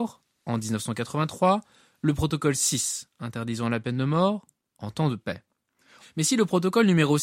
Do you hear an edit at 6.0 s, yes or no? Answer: yes